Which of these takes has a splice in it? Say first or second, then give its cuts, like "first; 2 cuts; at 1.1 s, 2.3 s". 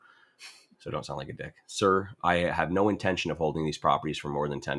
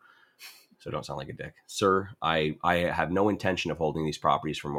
first; 1 cut; at 2.2 s